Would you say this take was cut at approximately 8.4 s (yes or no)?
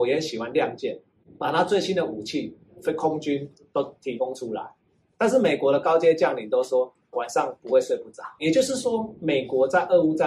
no